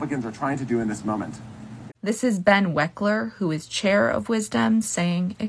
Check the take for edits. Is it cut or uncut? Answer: cut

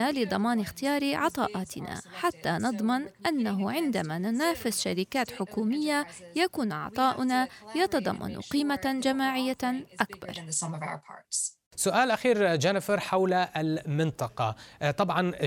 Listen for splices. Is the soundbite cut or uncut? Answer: cut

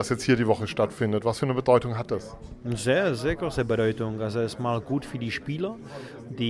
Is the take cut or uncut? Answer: uncut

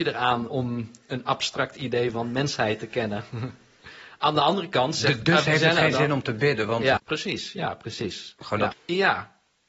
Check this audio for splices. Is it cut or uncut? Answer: cut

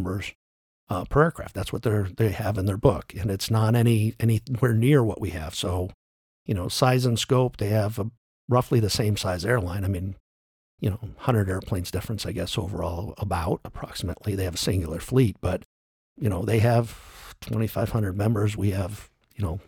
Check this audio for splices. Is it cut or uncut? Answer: uncut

